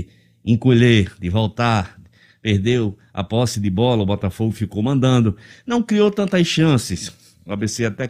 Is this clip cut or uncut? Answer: uncut